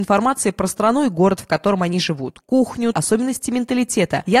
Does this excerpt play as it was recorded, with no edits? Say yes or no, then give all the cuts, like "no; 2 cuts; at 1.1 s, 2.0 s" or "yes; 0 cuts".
no; 1 cut; at 2.9 s